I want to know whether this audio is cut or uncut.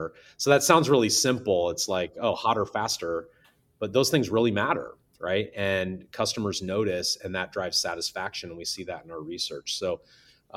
uncut